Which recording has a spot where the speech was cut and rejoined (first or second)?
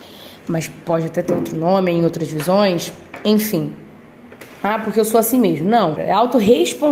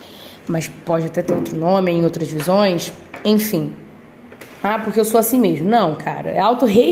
first